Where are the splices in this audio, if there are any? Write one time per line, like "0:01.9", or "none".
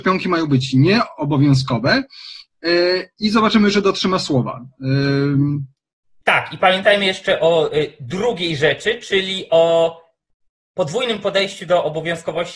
none